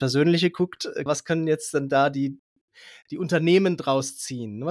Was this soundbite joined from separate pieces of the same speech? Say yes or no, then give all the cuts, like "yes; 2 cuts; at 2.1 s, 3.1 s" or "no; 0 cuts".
yes; 1 cut; at 1.1 s